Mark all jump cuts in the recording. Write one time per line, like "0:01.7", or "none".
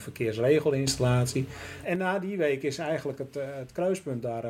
0:01.8